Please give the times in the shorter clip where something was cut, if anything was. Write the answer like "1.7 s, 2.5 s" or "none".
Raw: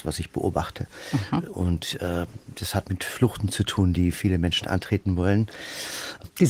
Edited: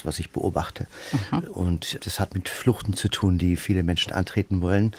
2.0 s

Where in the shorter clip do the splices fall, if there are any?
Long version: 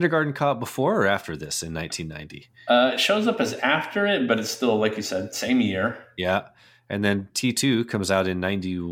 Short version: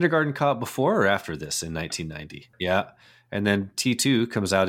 2.5 s

